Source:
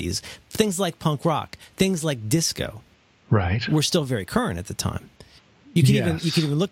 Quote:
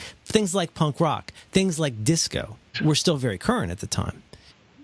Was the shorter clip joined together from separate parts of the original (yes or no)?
yes